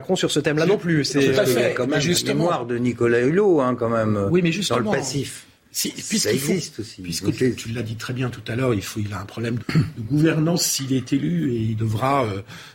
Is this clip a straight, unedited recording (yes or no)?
no